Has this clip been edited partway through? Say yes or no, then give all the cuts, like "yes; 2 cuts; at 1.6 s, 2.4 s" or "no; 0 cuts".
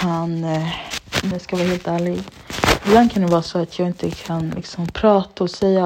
yes; 1 cut; at 1.3 s